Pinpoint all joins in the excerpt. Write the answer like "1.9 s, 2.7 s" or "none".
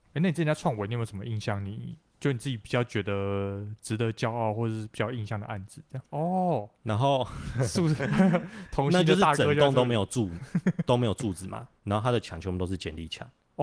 6.1 s